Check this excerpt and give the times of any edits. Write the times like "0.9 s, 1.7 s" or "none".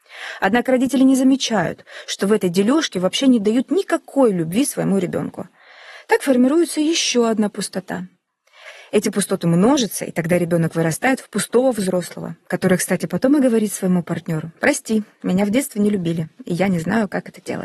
none